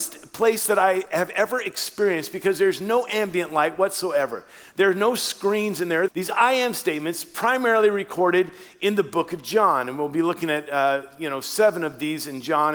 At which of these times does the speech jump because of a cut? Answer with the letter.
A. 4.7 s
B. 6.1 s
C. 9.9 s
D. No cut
B